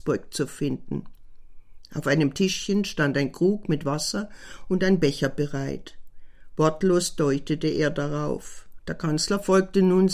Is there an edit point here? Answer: yes; 1 cut; at 8.8 s

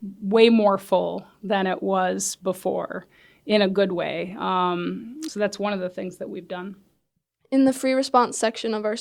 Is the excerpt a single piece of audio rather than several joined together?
yes; 0 cuts

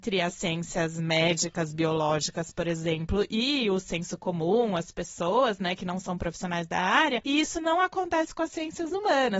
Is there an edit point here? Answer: no; 0 cuts

